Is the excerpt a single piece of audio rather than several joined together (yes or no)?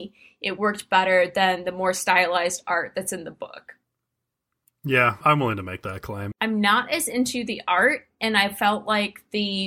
no